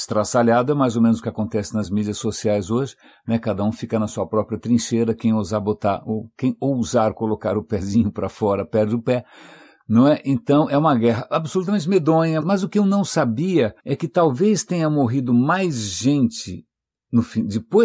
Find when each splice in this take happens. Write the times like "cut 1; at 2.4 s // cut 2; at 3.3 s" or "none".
cut 1; at 12.4 s // cut 2; at 13.8 s